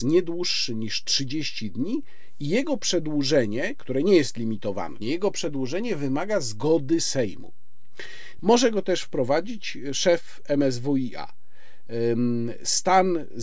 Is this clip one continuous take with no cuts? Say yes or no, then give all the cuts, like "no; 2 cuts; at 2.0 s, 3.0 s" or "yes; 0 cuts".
no; 2 cuts; at 5.0 s, 8.4 s